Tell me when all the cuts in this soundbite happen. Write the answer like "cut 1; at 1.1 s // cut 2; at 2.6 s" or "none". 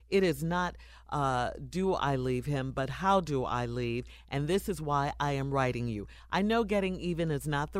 none

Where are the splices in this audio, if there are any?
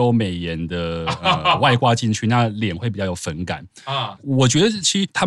cut 1; at 4.2 s

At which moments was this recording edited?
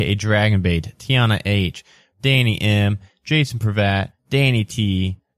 cut 1; at 2.1 s // cut 2; at 4.2 s

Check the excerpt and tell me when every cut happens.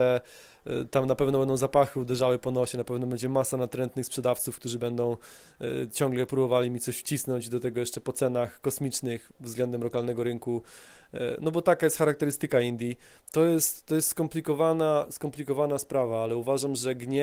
cut 1; at 13.2 s

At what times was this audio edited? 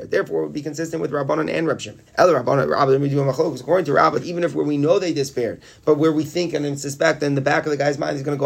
cut 1; at 2.1 s // cut 2; at 4.2 s

